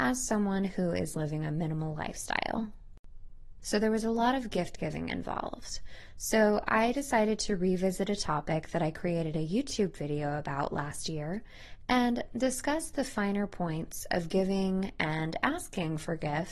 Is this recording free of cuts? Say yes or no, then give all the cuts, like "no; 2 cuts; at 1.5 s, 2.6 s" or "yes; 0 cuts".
no; 1 cut; at 3.6 s